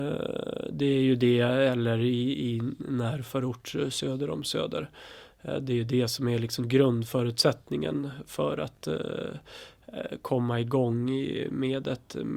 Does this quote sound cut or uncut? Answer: uncut